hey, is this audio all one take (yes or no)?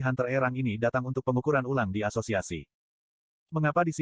yes